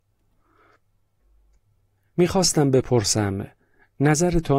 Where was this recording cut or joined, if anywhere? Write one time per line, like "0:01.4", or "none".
none